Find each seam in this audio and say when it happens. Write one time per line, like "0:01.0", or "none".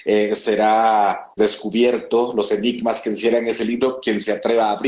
0:01.4